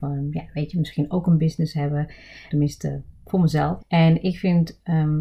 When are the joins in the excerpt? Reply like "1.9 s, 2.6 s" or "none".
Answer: 2.5 s, 3.8 s